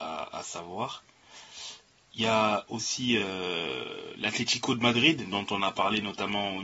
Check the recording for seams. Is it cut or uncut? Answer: uncut